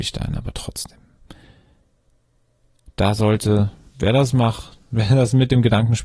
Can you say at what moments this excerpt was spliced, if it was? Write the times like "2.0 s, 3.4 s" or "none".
none